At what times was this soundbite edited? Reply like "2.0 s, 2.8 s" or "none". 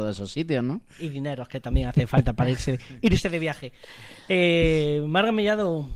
none